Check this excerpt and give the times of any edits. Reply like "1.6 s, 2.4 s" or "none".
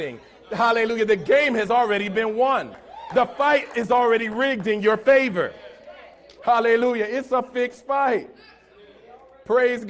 6.4 s